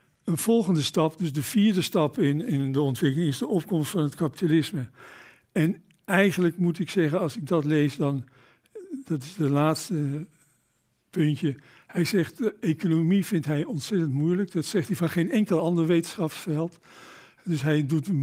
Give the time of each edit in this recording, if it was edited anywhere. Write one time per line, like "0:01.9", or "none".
none